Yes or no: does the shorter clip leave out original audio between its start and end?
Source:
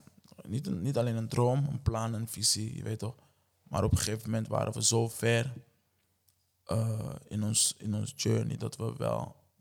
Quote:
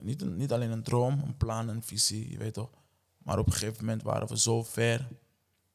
no